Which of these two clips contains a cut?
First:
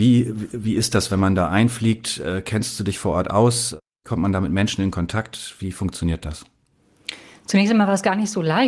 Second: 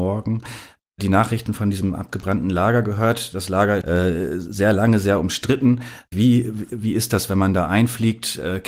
second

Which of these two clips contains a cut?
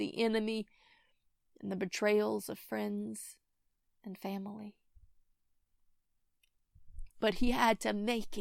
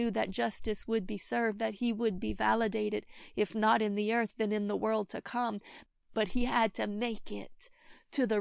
first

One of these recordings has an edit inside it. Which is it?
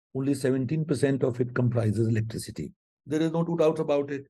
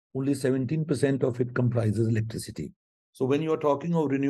first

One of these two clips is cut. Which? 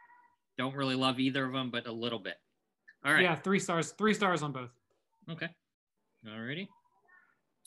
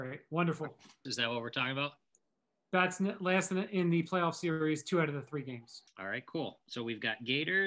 second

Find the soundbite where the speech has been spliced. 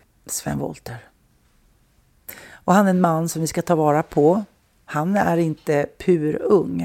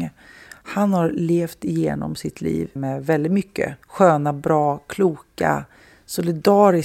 second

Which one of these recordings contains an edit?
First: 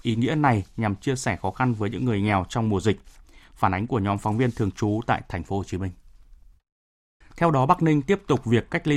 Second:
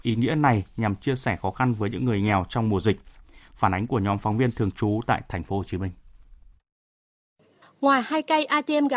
first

